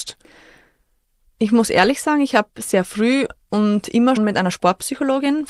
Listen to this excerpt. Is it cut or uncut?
cut